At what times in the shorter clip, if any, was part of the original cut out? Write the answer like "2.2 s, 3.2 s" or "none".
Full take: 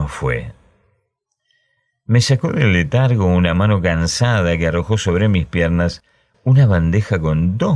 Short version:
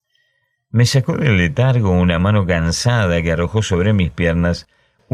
none